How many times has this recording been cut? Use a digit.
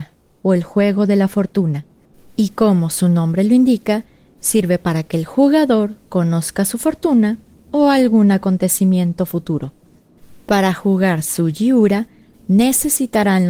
0